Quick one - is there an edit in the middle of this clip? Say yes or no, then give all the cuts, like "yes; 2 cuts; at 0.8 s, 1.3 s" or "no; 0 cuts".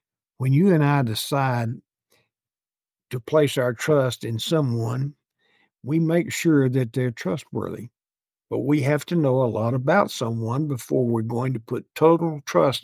yes; 1 cut; at 8.4 s